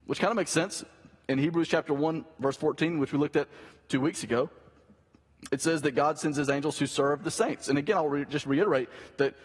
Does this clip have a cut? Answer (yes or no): no